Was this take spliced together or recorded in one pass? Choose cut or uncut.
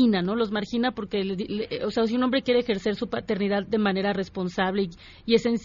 uncut